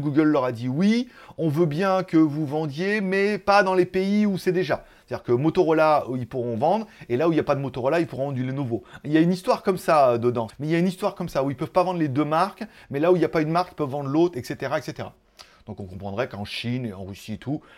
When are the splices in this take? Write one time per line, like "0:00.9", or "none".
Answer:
0:10.5